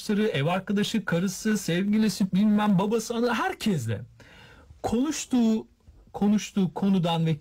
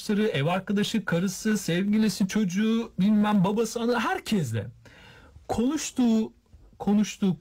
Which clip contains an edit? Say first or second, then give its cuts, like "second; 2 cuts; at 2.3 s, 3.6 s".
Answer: first; 1 cut; at 2.3 s